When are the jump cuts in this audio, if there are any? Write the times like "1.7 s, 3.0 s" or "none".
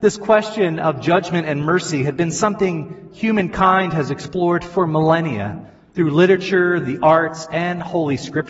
none

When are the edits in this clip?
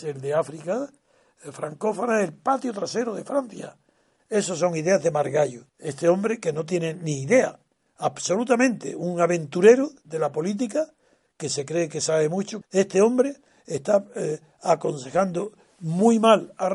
4.2 s, 5.7 s, 12.6 s

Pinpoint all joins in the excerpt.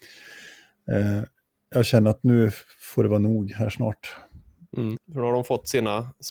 5.0 s

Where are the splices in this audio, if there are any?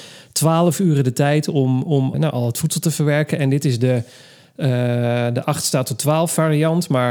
2.1 s

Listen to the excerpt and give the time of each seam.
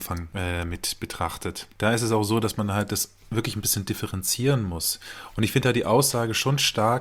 none

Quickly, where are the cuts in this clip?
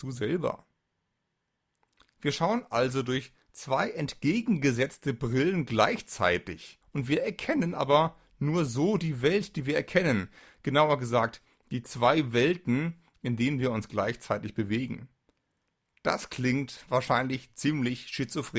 6.8 s

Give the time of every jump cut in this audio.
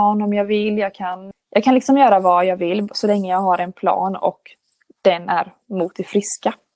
1.3 s

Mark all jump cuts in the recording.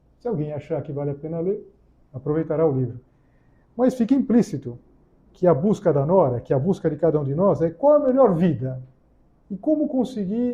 9.4 s

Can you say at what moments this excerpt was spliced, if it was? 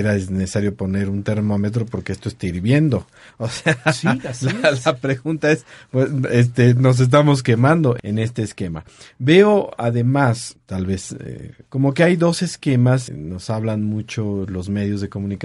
11.7 s, 13.1 s

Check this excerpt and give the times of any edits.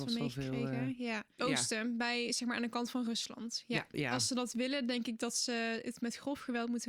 1.4 s, 3.9 s

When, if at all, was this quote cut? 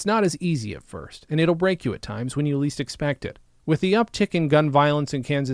3.6 s

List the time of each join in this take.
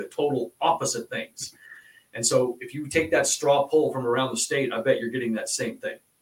none

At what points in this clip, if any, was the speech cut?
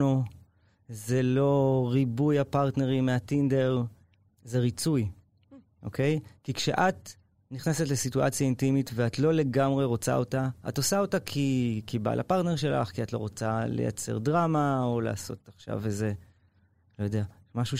none

